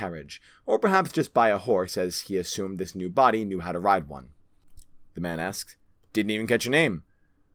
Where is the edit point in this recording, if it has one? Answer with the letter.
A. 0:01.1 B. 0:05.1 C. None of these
B